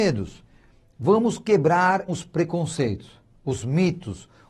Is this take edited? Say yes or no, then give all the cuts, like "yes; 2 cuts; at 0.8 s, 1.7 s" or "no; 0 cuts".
yes; 1 cut; at 2.1 s